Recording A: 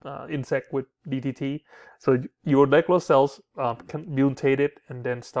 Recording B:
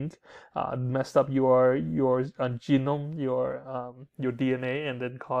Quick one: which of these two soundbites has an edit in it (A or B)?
A